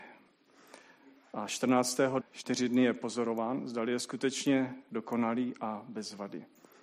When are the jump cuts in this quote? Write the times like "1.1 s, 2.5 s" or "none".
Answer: 2.2 s